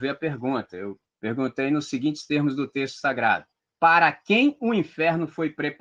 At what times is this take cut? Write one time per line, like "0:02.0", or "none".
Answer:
0:01.1